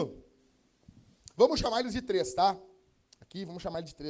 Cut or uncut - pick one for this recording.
uncut